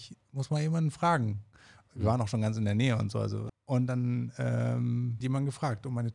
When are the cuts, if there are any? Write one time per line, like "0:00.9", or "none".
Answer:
0:03.5
0:05.2